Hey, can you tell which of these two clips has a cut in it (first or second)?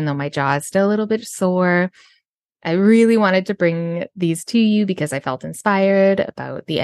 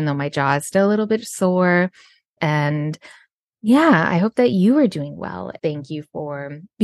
second